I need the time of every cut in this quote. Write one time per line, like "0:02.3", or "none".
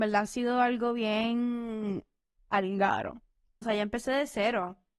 0:03.6